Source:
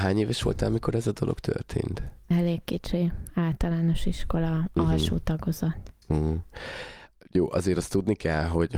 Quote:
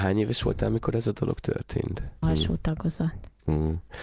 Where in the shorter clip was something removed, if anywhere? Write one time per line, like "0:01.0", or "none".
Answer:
0:02.2